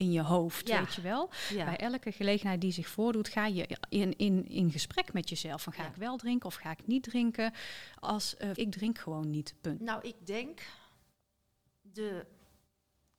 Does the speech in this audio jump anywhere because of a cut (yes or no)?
yes